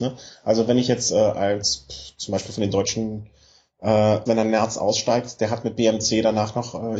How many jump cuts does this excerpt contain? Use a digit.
1